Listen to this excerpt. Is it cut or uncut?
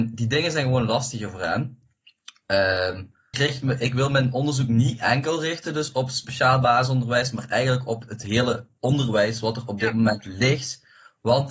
cut